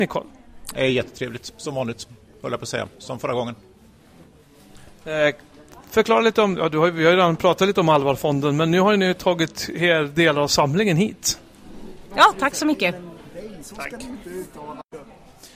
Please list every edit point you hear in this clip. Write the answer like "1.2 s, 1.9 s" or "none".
12.1 s